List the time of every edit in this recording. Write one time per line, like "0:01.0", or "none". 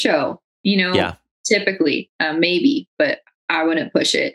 none